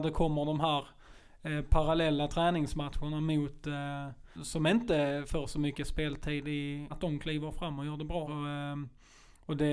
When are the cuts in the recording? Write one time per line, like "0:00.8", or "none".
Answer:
0:04.3
0:06.9
0:08.2